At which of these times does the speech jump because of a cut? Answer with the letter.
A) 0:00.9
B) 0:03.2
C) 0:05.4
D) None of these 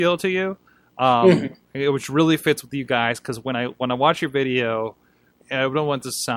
C